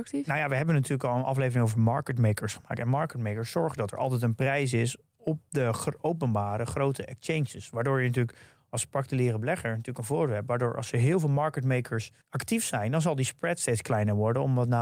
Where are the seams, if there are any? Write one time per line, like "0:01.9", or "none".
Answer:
0:12.2